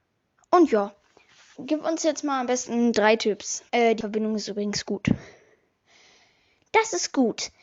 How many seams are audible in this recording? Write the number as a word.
two